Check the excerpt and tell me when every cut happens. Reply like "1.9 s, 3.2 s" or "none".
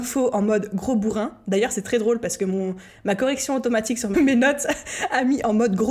4.1 s

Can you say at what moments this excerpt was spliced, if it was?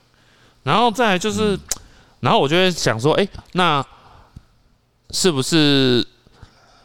5.0 s

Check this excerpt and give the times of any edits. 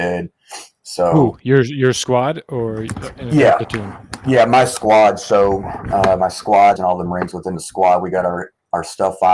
6.8 s

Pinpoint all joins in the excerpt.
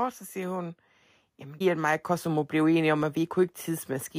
1.6 s

